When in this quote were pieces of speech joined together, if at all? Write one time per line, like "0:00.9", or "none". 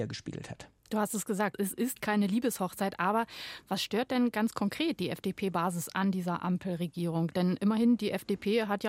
0:01.5